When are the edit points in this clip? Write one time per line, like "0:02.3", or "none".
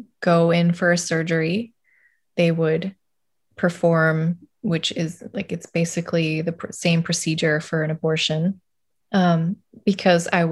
0:09.0